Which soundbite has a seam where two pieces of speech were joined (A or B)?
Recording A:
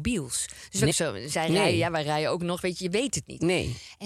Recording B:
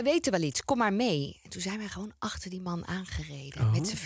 A